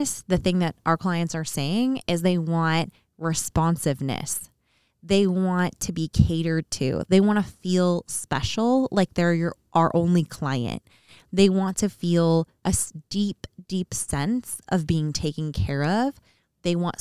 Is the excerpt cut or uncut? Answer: uncut